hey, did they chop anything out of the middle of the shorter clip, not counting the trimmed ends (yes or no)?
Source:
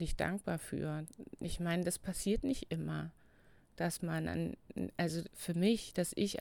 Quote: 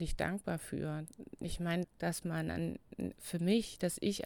yes